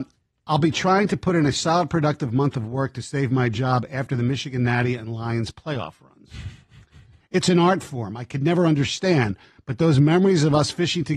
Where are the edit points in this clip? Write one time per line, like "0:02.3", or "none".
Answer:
0:07.2